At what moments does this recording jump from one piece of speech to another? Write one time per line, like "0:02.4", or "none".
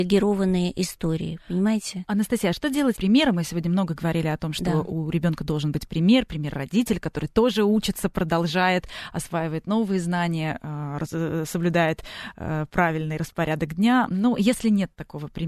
0:02.9